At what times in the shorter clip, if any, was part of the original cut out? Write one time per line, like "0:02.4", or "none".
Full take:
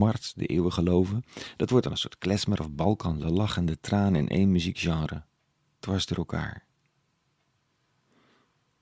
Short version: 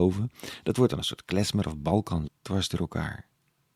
0:02.3